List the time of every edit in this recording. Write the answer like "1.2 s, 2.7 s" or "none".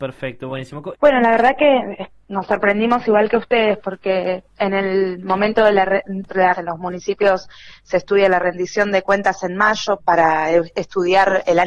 0.9 s, 6.5 s, 10.0 s